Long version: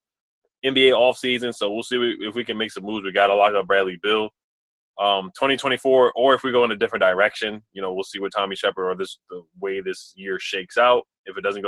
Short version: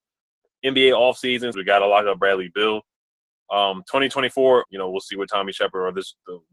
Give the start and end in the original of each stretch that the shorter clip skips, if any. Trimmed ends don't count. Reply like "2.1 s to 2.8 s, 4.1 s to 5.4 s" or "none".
1.5 s to 3.0 s, 6.1 s to 7.7 s